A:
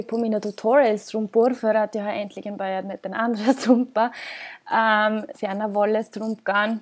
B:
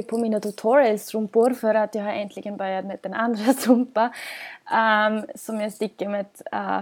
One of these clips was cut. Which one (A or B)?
A